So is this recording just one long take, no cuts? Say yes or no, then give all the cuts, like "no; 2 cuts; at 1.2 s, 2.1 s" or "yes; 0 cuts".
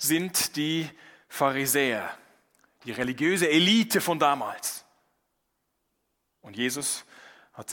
yes; 0 cuts